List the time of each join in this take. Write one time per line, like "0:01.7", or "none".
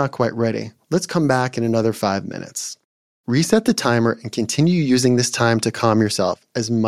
none